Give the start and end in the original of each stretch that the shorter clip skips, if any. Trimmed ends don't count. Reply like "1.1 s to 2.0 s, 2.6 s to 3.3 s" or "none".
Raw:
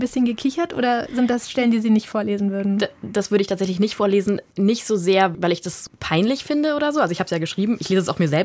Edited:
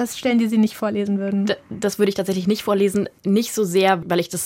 none